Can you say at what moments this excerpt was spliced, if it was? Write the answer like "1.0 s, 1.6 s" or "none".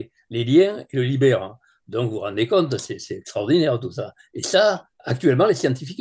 4.9 s